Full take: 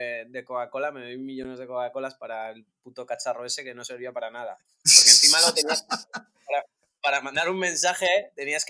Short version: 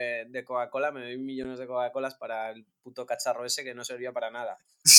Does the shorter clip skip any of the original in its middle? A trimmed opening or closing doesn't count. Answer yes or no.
no